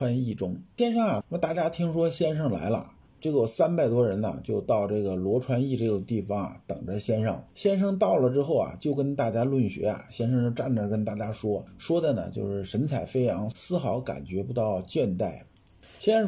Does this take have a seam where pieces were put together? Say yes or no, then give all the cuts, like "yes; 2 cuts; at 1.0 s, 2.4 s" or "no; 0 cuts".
yes; 1 cut; at 1.2 s